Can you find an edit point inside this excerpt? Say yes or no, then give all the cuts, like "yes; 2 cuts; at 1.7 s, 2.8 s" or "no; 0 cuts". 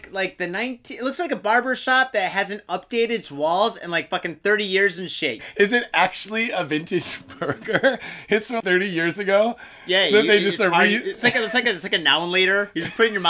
yes; 2 cuts; at 5.4 s, 8.6 s